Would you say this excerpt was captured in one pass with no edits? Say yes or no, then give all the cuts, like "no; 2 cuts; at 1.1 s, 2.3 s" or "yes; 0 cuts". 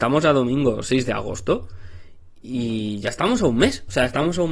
yes; 0 cuts